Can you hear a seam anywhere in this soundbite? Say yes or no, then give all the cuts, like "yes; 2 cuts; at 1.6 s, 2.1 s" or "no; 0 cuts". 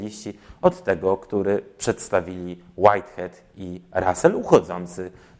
no; 0 cuts